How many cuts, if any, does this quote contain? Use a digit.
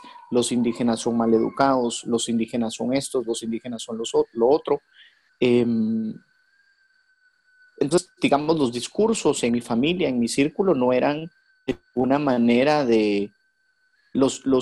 1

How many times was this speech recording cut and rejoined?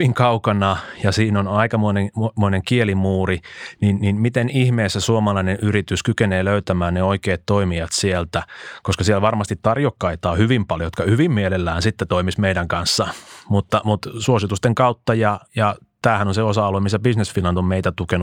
1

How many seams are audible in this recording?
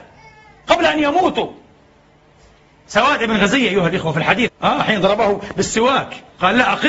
1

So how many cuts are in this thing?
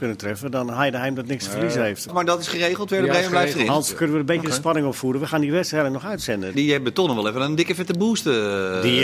2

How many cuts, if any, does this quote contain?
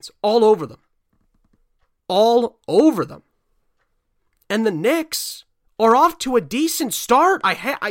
0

